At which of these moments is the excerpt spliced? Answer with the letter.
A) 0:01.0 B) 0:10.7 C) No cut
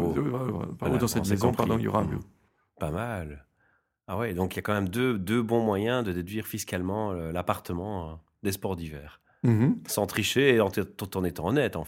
B